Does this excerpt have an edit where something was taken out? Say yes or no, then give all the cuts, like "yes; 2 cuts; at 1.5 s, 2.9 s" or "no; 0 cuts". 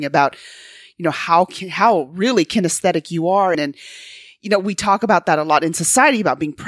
yes; 1 cut; at 3.5 s